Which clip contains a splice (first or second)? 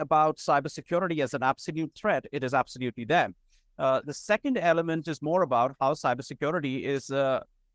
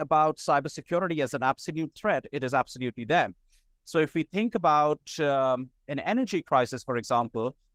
second